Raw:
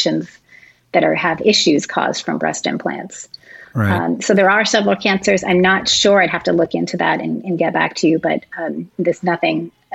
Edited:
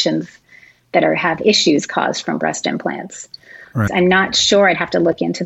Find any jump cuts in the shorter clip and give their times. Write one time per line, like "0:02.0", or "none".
0:03.9